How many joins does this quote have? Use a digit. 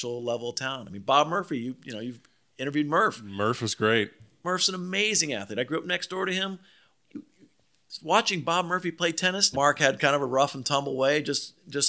1